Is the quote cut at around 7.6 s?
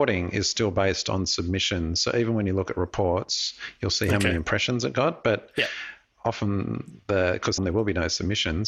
yes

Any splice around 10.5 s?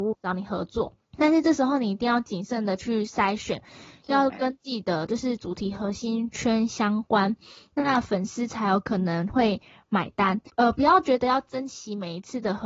yes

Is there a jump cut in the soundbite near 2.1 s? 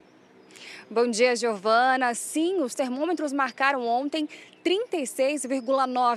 no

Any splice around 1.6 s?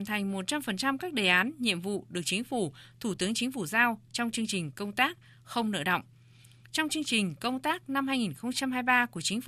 no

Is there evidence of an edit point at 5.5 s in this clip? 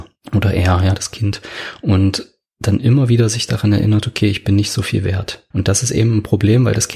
yes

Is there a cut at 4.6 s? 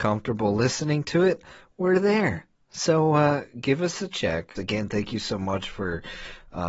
yes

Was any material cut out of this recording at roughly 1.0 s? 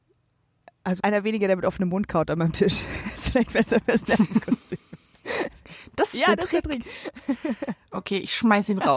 yes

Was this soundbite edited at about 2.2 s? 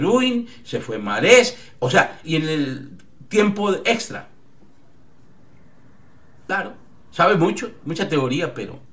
yes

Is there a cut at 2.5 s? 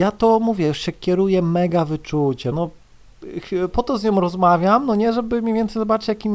yes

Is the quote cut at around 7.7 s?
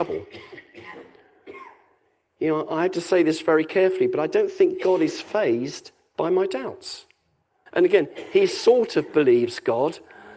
yes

